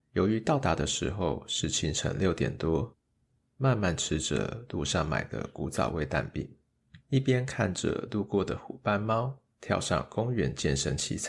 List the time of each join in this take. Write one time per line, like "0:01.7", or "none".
0:03.4
0:07.0